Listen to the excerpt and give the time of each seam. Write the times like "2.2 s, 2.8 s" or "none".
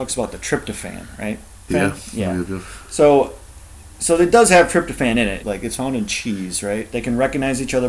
1.7 s, 5.4 s, 6.9 s

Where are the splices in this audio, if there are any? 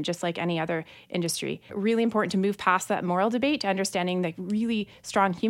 1.7 s

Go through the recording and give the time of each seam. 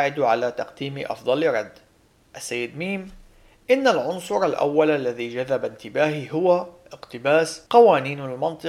7.7 s

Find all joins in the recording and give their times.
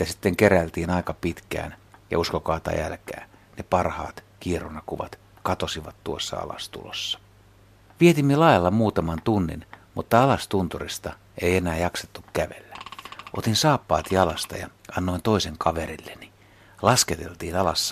3.4 s, 8.0 s

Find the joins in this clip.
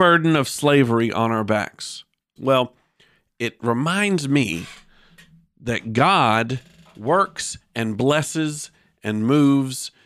2.4 s

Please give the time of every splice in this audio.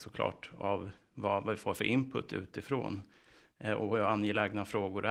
none

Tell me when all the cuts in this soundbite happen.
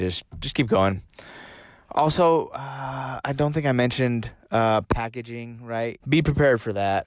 6.0 s

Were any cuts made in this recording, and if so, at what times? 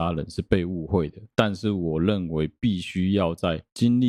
1.3 s

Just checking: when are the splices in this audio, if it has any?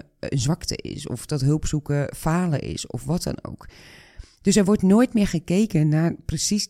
none

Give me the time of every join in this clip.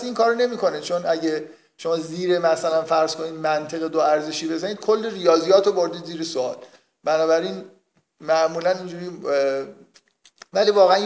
none

